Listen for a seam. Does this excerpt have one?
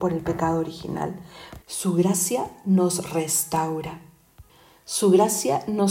yes; 1 cut; at 1.6 s

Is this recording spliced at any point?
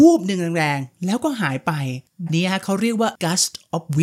yes; 1 cut; at 2.3 s

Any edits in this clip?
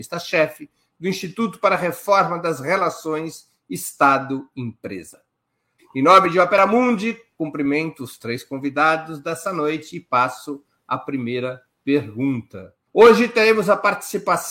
yes; 2 cuts; at 5.8 s, 12.9 s

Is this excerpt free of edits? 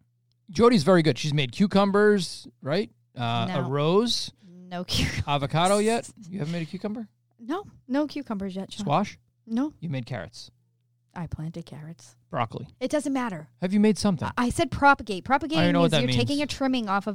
yes; 0 cuts

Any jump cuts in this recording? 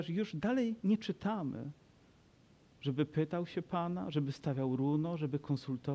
no; 0 cuts

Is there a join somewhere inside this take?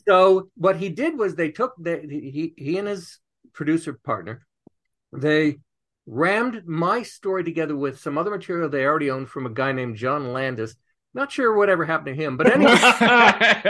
no; 0 cuts

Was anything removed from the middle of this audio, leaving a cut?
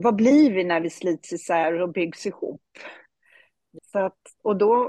yes; 1 cut; at 3.8 s

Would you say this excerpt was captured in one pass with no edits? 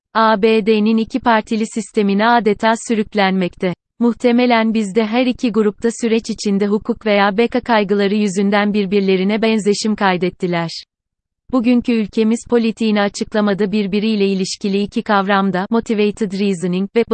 no; 1 cut; at 3.9 s

